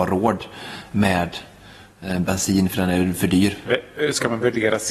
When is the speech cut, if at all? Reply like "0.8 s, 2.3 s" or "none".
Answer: 3.6 s